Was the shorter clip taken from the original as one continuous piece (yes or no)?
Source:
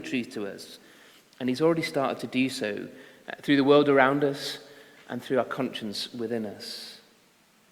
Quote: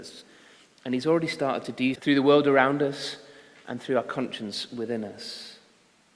no